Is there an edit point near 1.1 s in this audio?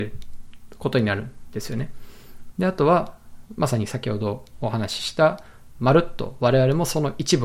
no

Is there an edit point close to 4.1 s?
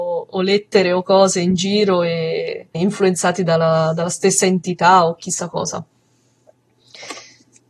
no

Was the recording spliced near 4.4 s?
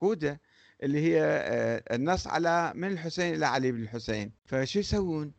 yes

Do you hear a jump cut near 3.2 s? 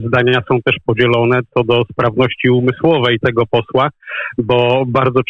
yes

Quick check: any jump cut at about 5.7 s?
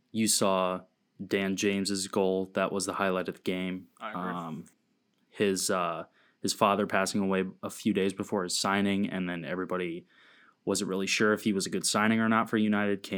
no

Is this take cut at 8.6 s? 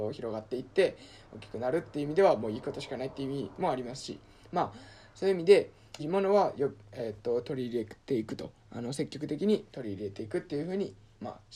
yes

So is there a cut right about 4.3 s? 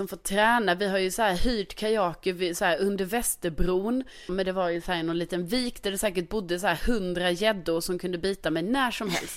yes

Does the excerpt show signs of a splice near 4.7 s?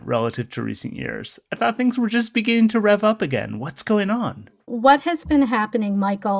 yes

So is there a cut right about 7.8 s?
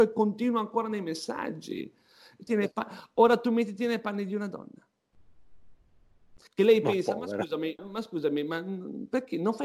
yes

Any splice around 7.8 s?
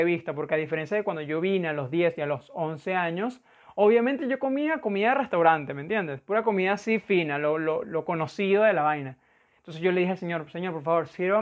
yes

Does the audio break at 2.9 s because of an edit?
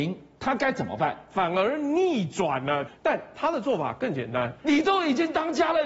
yes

